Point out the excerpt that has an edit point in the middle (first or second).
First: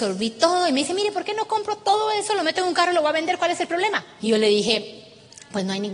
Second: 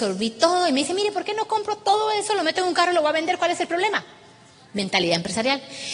first